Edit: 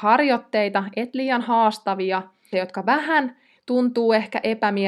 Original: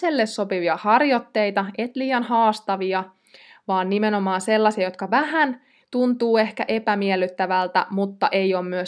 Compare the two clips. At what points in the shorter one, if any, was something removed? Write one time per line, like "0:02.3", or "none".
0:02.5